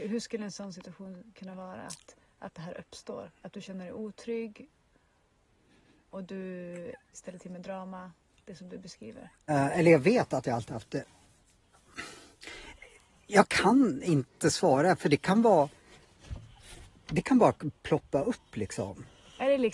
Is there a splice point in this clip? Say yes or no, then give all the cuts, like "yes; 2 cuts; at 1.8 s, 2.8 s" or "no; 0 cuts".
yes; 1 cut; at 9.5 s